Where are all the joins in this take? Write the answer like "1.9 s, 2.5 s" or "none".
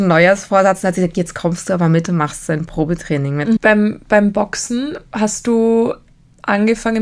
3.6 s